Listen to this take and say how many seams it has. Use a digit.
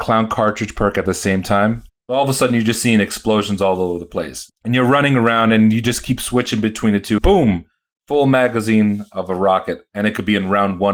3